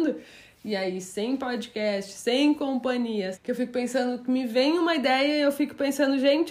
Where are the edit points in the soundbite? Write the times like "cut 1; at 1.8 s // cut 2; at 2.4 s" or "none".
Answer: cut 1; at 3.3 s